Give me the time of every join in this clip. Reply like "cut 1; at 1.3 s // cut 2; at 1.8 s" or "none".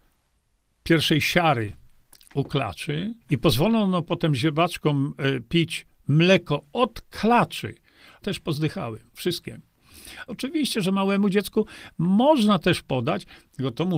cut 1; at 3.2 s // cut 2; at 8.2 s // cut 3; at 10.3 s